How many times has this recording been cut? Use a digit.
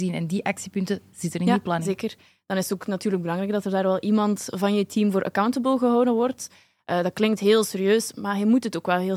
0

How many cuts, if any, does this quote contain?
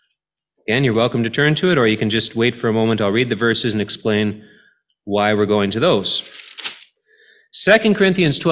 0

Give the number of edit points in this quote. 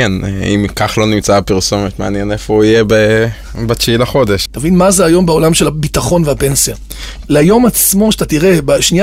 2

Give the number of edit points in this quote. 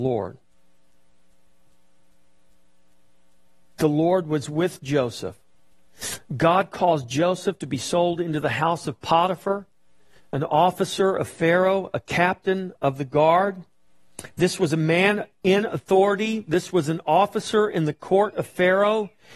0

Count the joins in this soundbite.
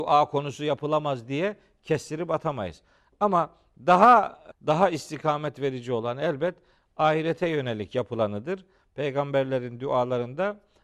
1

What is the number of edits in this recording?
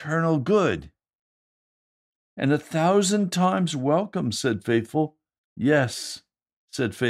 1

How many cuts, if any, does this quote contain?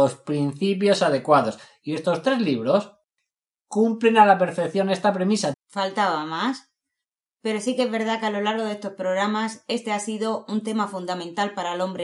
1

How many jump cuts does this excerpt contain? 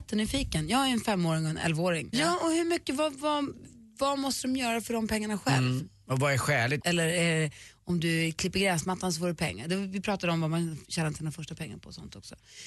2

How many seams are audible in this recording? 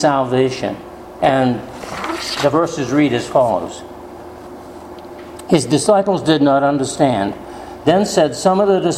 2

